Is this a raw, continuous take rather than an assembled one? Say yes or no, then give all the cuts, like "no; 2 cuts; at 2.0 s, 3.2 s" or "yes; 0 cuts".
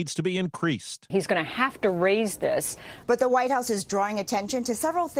no; 2 cuts; at 1.1 s, 3.0 s